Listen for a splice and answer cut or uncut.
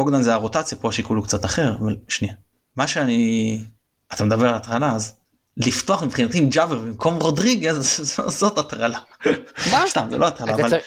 uncut